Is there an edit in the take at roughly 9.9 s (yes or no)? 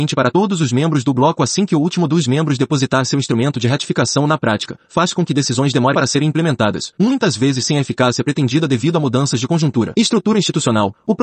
no